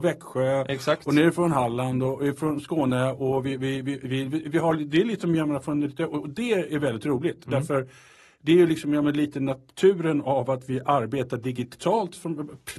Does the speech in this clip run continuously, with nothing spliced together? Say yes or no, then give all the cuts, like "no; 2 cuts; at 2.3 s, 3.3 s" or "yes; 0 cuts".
yes; 0 cuts